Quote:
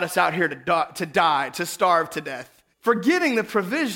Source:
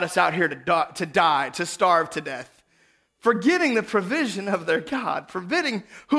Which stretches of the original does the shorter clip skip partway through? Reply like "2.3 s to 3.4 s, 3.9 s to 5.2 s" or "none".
2.7 s to 3.1 s